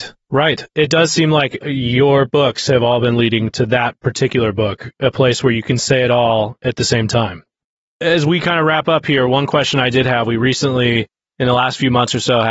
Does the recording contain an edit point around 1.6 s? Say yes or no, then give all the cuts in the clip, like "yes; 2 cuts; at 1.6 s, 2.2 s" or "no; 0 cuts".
yes; 1 cut; at 1.6 s